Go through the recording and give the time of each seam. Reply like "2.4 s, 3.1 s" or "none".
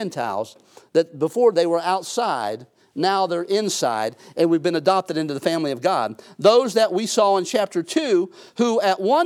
none